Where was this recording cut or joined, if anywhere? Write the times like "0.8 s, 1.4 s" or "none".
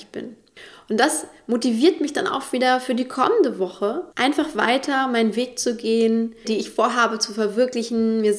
4.1 s, 6.4 s

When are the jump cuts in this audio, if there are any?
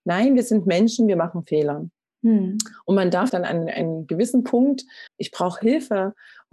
3.3 s, 5.1 s

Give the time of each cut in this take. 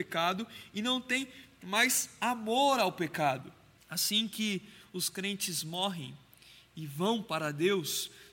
3.8 s

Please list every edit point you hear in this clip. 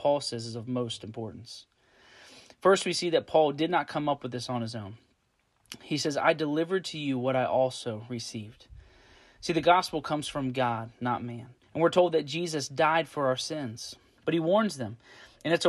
11.6 s, 14.2 s

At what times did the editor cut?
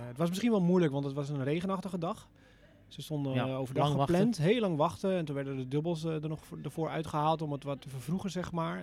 7.8 s

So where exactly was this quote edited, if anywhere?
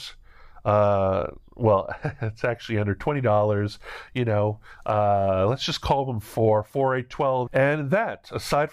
7.5 s

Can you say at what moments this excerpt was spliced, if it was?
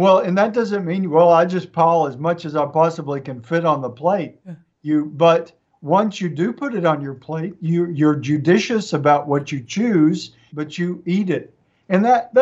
10.5 s

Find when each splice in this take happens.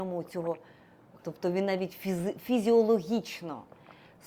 1.2 s

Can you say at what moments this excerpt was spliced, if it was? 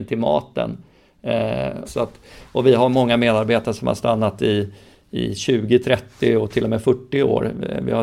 1.8 s

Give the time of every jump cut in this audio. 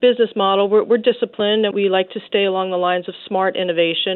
1.7 s

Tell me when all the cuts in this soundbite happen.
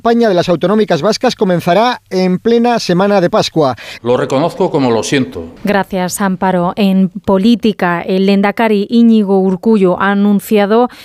4.0 s, 5.6 s

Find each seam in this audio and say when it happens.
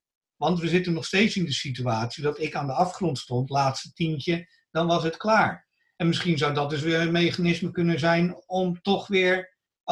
none

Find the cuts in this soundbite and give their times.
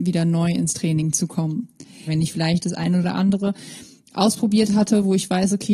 2.1 s

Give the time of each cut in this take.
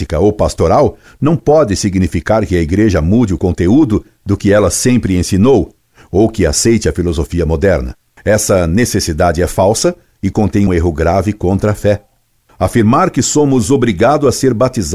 8.2 s, 10.7 s

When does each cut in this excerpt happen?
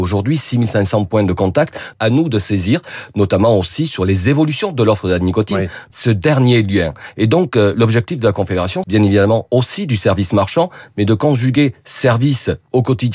1.9 s, 5.9 s, 8.8 s

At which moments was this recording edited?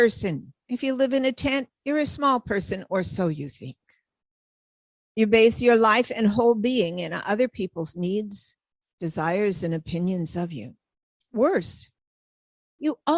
none

